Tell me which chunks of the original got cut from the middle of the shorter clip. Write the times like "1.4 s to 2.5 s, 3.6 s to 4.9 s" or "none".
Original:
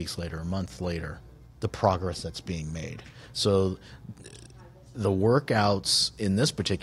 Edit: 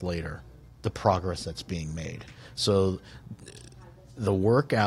none